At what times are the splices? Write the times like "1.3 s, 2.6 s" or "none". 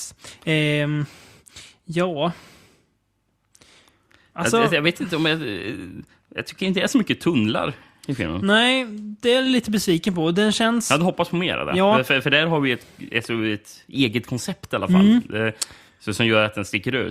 none